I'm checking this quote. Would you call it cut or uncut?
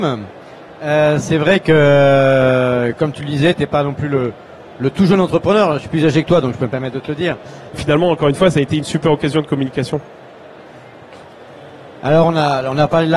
cut